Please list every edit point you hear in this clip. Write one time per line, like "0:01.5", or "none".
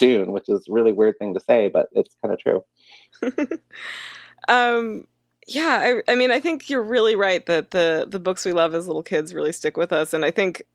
none

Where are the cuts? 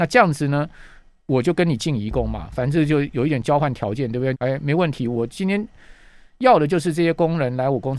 0:04.3

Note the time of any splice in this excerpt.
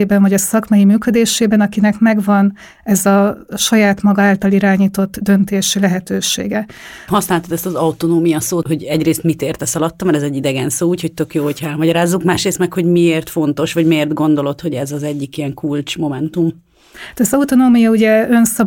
0:07.1
0:08.6

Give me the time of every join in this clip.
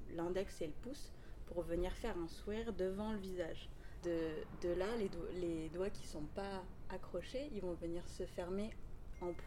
0:04.0

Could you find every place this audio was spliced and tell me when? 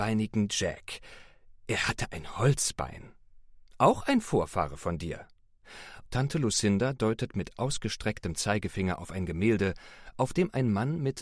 0:06.1

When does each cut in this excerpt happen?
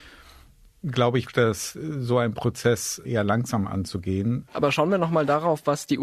0:01.2
0:04.5

